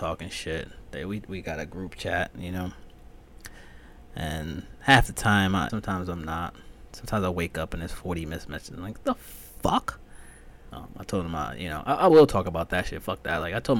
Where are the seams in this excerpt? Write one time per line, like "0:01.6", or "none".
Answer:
0:05.7
0:10.7